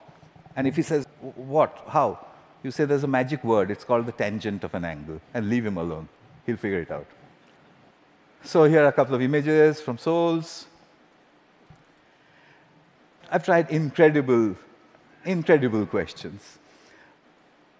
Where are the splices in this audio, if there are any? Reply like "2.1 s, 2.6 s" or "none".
1.0 s